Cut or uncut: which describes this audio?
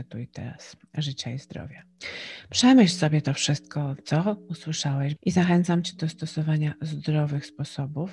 cut